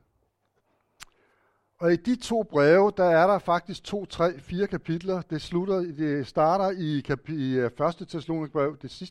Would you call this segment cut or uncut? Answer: uncut